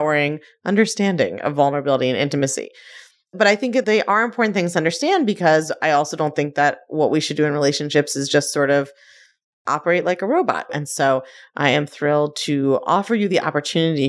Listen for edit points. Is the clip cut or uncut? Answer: cut